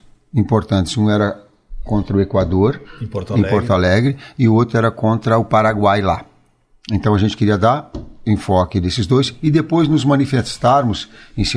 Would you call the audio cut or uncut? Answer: uncut